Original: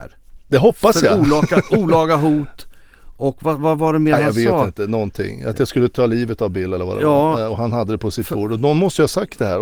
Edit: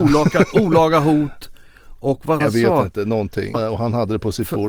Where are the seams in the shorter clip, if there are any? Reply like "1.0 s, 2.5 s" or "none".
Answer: 2.4 s, 3.5 s